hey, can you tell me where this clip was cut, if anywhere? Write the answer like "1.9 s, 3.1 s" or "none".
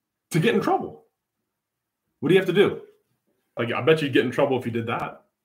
3.6 s